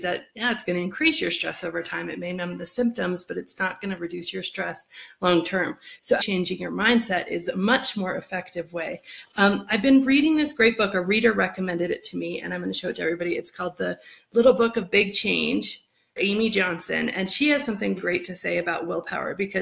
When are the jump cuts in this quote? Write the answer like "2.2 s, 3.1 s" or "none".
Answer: 6.2 s, 16.2 s, 18.0 s